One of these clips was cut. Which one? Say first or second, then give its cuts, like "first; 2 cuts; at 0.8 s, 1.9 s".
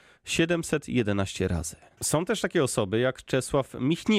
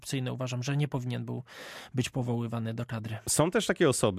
first; 1 cut; at 2.0 s